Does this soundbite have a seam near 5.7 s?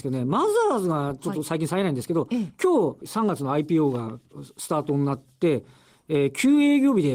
no; 1 cut; at 3.0 s

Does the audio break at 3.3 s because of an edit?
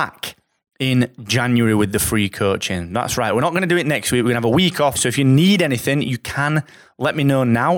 no; 1 cut; at 4.9 s

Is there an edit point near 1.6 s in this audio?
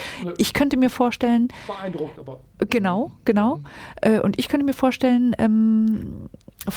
no; 0 cuts

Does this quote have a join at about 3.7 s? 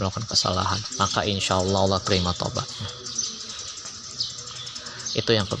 no; 1 cut; at 0.9 s

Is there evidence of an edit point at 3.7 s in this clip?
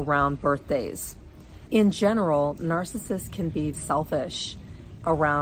yes; 1 cut; at 3.7 s

